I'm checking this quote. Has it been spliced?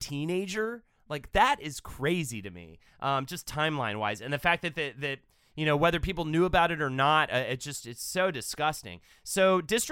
no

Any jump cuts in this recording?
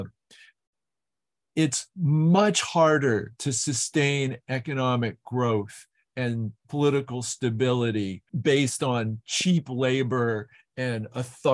yes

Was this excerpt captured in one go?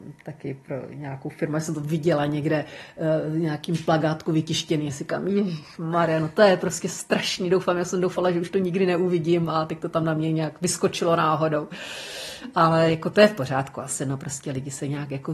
yes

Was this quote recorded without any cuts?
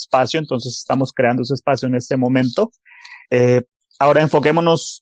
no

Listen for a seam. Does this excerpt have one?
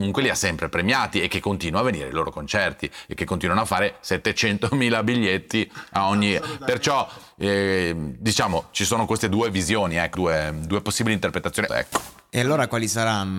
yes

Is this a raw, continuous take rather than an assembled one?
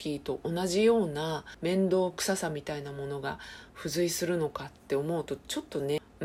yes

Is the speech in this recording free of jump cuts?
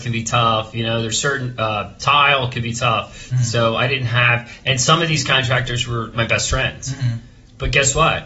no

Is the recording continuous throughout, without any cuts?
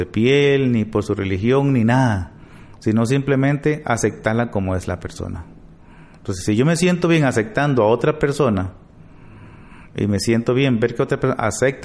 yes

